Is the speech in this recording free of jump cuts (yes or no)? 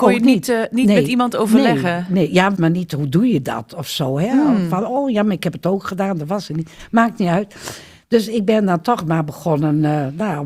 no